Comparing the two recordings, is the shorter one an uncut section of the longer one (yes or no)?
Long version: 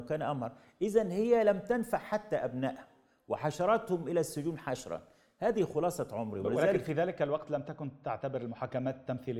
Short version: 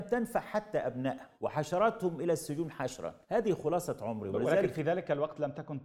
no